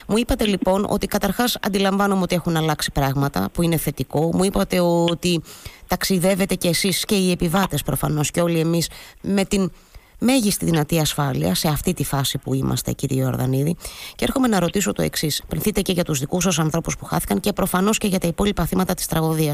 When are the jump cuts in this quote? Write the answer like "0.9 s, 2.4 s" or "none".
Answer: 15.4 s